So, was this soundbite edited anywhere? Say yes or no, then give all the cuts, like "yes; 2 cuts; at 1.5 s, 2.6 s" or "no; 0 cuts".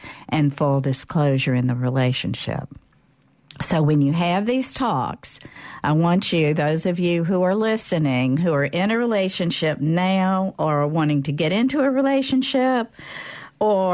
no; 0 cuts